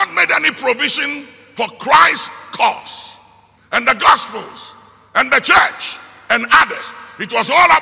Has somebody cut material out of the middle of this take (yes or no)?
yes